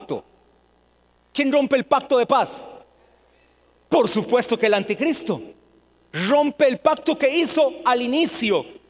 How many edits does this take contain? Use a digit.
0